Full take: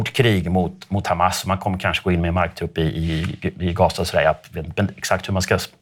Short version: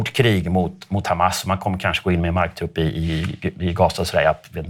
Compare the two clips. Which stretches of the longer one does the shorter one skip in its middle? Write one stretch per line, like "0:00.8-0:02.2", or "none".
none